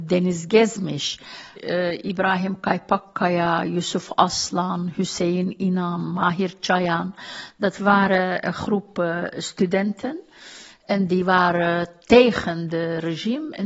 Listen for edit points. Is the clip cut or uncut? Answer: uncut